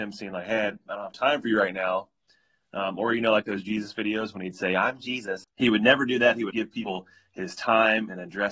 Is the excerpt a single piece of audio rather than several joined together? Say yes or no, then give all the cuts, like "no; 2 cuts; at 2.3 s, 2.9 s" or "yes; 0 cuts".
no; 2 cuts; at 5.4 s, 6.5 s